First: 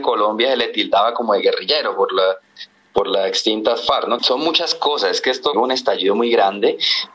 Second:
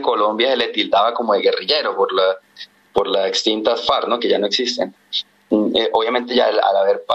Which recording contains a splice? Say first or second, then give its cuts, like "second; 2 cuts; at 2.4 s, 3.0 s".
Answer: first; 2 cuts; at 4.2 s, 5.5 s